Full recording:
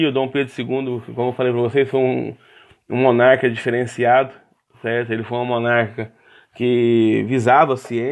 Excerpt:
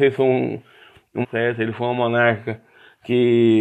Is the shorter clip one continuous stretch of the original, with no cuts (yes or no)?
no